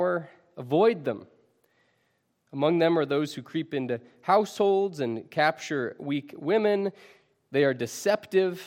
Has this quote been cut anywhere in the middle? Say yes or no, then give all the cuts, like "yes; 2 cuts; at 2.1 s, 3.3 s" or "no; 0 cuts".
no; 0 cuts